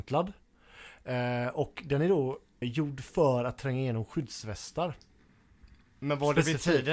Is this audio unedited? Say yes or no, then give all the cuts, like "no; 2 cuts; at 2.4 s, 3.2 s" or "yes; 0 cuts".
no; 1 cut; at 2.6 s